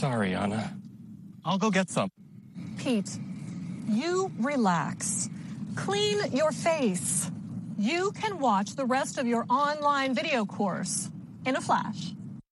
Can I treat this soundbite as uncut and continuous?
no; 1 cut; at 11.4 s

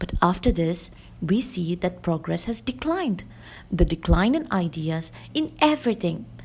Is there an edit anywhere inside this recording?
yes; 1 cut; at 5.3 s

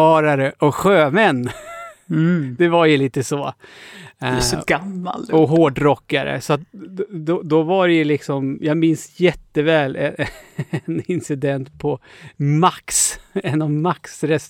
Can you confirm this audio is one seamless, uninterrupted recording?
yes; 0 cuts

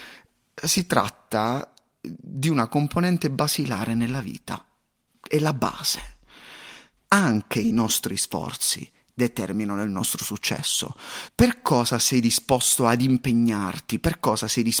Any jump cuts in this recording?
yes; 2 cuts; at 6.9 s, 11.3 s

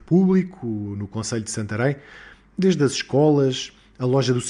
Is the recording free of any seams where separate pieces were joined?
yes; 0 cuts

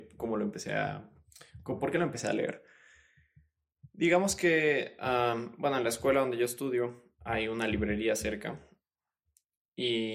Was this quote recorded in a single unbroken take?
yes; 0 cuts

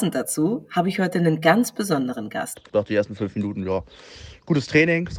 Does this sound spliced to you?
yes; 1 cut; at 2.5 s

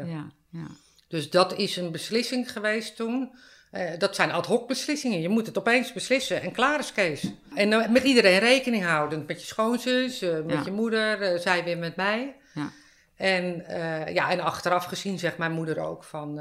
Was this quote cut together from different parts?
no; 0 cuts

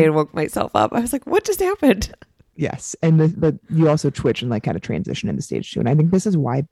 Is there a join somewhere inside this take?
no; 0 cuts

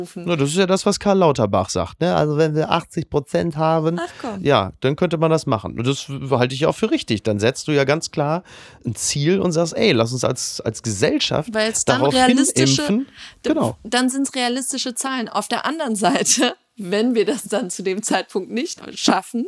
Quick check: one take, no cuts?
yes; 0 cuts

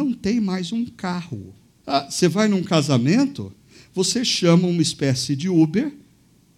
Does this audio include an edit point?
yes; 1 cut; at 1.8 s

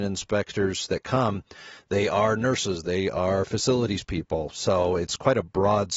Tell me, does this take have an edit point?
yes; 1 cut; at 2.8 s

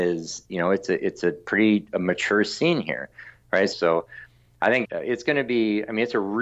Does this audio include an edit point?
yes; 2 cuts; at 3.7 s, 4.8 s

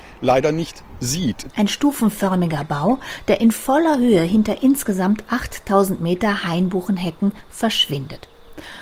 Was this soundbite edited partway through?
yes; 1 cut; at 1.5 s

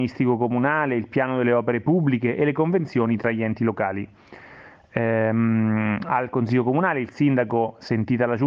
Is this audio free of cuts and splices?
yes; 0 cuts

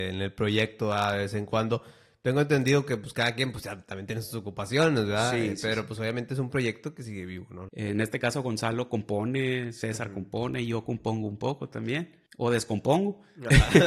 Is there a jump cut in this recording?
yes; 2 cuts; at 7.7 s, 12.3 s

